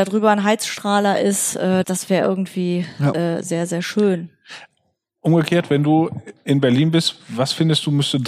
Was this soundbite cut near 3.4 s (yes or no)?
no